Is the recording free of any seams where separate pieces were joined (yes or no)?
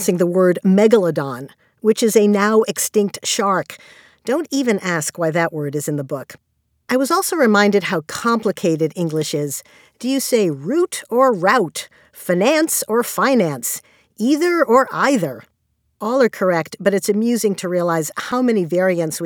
yes